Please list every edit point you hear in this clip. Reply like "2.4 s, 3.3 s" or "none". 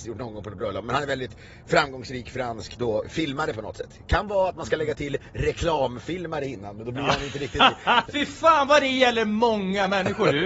3.0 s, 8.1 s